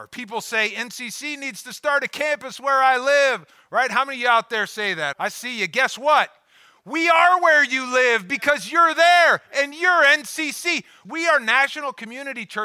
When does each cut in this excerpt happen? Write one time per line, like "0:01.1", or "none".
0:05.1
0:11.0